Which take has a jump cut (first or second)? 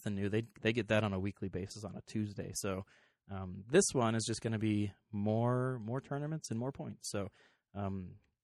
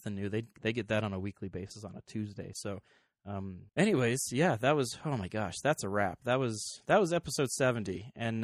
second